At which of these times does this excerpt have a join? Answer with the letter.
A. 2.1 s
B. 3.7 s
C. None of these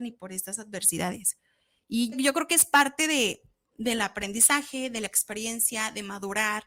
A